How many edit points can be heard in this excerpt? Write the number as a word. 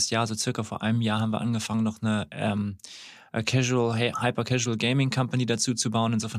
zero